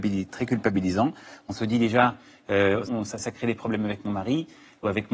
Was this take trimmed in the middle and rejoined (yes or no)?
yes